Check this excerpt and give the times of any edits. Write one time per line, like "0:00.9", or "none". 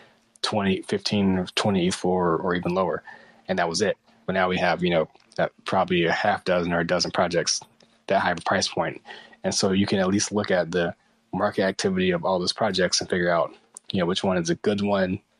none